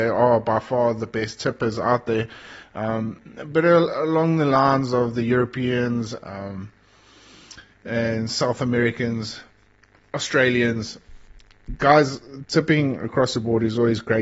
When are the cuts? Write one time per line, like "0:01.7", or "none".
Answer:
none